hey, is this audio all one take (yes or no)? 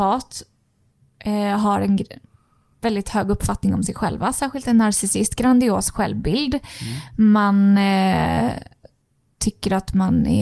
yes